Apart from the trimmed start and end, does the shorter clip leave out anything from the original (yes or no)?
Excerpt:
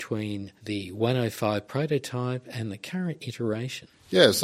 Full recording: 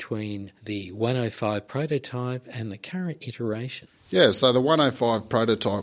no